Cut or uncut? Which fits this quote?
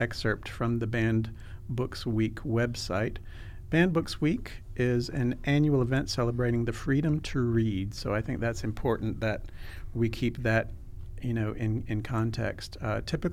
uncut